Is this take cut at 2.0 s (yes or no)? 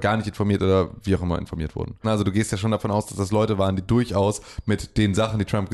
yes